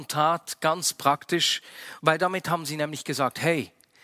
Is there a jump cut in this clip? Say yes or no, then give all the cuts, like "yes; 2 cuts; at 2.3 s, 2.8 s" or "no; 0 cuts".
yes; 1 cut; at 2.0 s